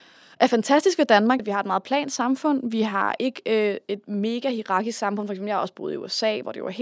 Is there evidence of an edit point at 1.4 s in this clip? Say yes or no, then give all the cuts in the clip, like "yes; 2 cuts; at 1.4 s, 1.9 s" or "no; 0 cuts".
yes; 1 cut; at 1.4 s